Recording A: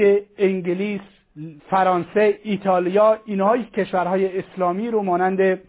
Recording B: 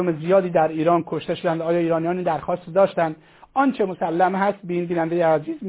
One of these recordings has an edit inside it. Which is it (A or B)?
A